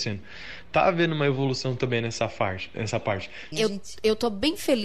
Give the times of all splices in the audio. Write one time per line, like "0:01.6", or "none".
0:03.5